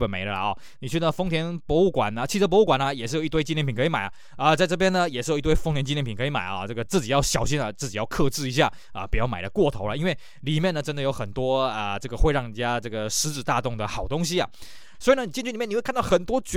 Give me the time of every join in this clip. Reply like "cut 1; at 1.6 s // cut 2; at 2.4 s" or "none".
cut 1; at 6.9 s // cut 2; at 14.9 s